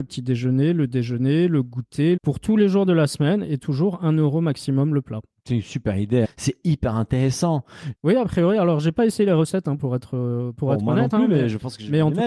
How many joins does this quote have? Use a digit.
3